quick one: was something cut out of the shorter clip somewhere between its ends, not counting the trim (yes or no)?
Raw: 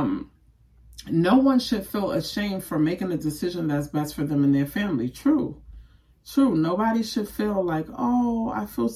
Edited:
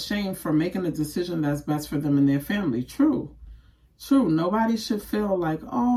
no